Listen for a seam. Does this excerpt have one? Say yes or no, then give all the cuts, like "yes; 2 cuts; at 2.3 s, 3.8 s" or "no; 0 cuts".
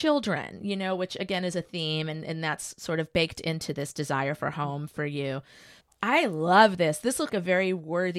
yes; 2 cuts; at 5.8 s, 7.3 s